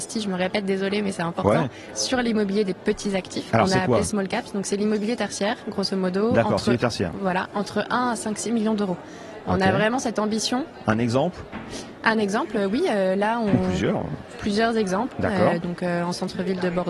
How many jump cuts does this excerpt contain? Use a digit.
1